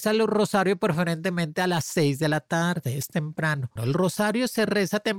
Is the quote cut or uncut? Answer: cut